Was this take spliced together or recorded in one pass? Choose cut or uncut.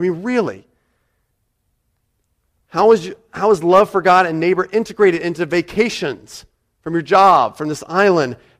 uncut